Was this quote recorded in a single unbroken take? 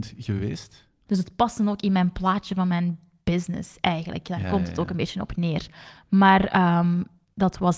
no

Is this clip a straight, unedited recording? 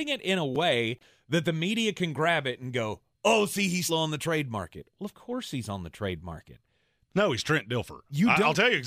no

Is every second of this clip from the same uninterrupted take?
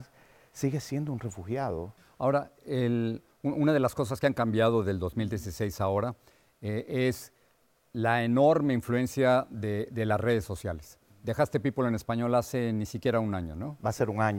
yes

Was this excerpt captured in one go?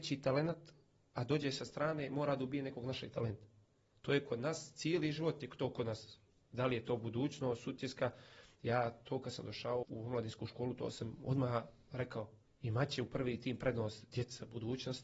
no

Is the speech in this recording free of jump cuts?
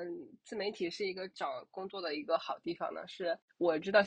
no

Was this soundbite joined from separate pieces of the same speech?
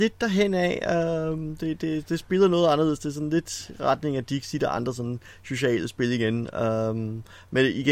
no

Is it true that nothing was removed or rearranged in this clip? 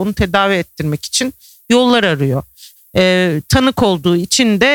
no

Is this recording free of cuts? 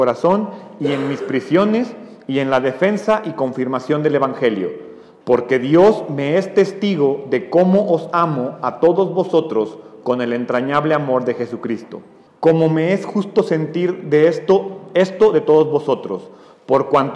no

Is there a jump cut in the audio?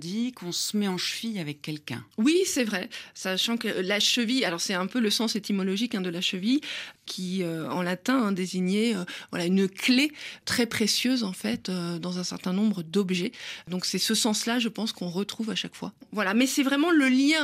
yes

